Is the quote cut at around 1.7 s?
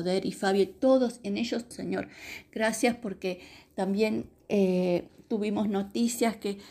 yes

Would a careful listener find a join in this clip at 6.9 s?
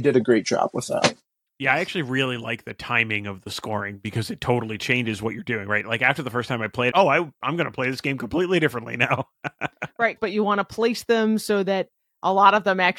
yes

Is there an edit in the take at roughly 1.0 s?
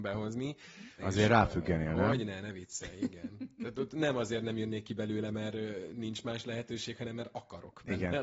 yes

